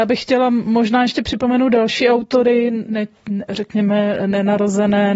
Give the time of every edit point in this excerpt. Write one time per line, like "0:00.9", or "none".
0:02.9